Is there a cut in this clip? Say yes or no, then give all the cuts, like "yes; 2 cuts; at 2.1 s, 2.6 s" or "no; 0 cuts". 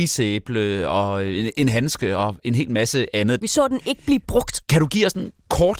yes; 2 cuts; at 3.4 s, 4.6 s